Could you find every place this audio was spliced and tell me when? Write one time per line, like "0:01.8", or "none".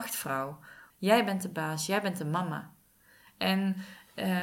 0:00.9
0:03.3